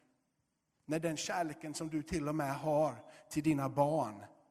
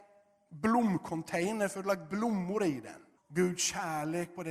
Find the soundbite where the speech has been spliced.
second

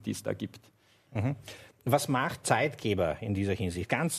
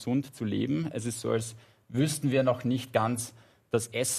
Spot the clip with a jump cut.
first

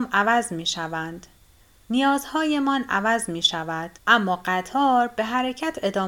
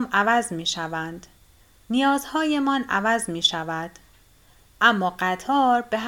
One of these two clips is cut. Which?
first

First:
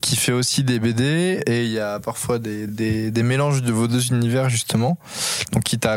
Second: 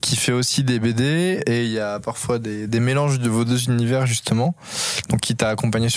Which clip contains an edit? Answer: second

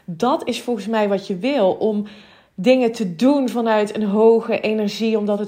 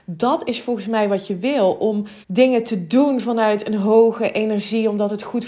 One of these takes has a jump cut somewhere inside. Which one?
second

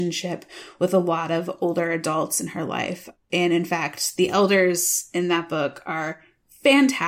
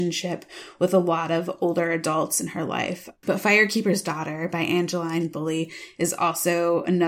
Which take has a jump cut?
second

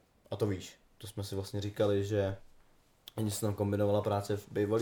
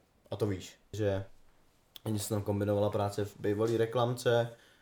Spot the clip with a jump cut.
second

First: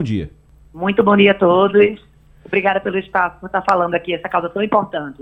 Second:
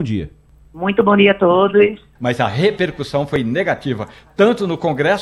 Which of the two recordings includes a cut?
second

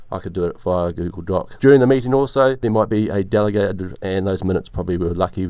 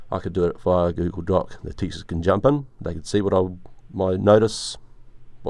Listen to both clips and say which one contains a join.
first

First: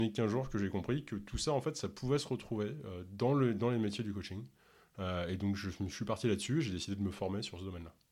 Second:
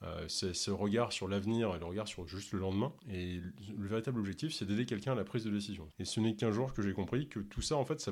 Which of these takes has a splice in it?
second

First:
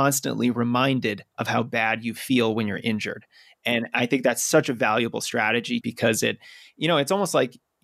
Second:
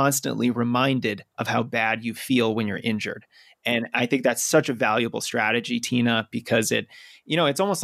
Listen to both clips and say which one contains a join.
first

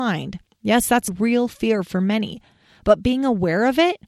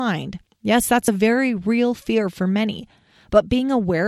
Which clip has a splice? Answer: first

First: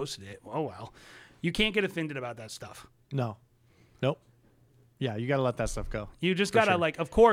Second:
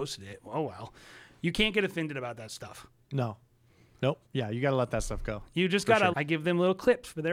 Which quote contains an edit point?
second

